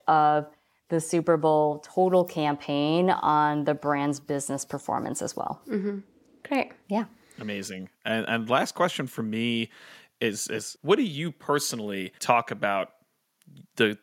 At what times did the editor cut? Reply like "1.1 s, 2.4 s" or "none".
10.8 s, 12.2 s

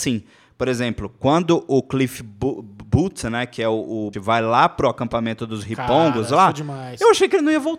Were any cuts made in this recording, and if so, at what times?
4.1 s

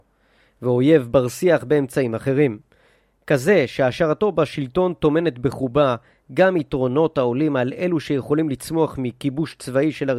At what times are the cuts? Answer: none

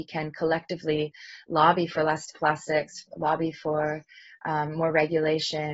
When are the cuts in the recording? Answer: none

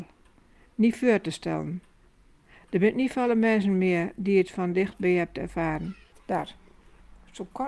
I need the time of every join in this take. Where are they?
6.1 s

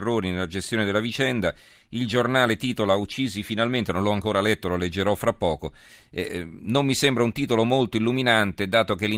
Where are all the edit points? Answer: none

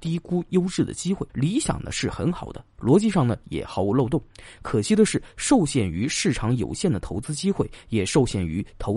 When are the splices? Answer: 1.3 s

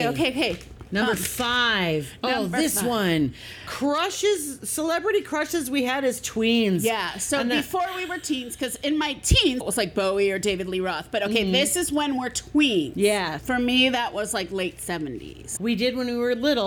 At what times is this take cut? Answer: 9.6 s, 13.4 s, 15.6 s

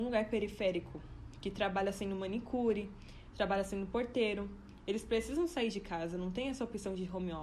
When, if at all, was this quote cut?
3.3 s

